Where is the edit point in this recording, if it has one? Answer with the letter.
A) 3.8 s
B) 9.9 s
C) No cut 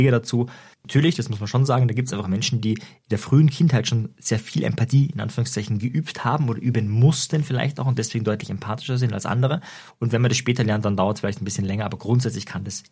C